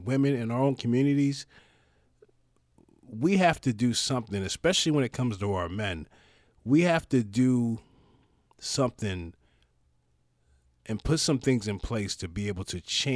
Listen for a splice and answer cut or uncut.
uncut